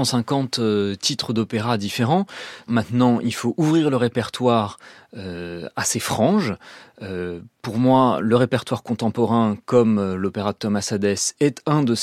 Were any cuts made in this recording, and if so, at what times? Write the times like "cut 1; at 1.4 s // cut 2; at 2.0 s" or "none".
cut 1; at 2.7 s